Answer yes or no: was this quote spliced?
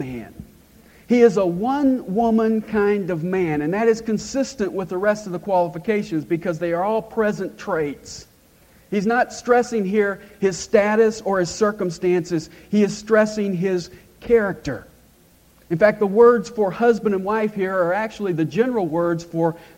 no